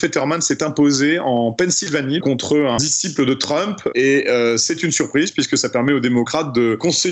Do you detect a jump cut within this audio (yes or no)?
yes